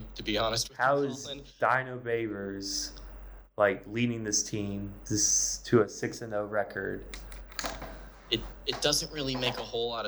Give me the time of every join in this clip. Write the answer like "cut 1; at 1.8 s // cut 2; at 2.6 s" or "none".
none